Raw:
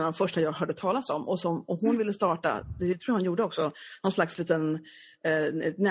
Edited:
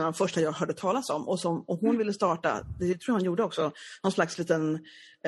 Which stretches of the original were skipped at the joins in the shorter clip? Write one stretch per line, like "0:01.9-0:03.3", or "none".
none